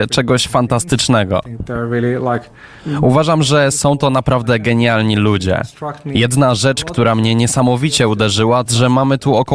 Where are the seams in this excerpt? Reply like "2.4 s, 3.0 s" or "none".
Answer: 8.7 s

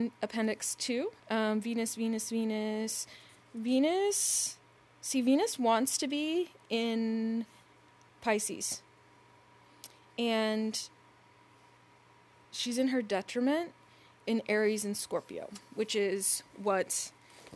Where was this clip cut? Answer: 1.2 s

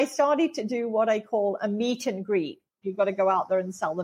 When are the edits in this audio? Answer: 2.8 s

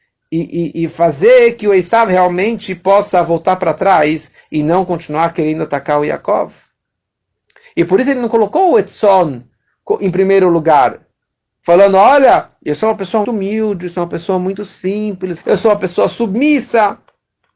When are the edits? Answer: 13.2 s, 15.4 s

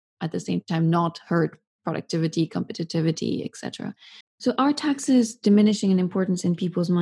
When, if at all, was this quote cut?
4.2 s

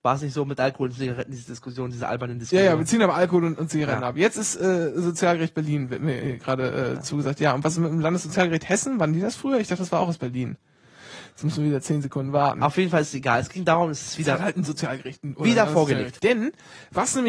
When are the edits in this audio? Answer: 16.2 s

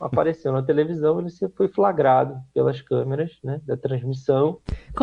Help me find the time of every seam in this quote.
none

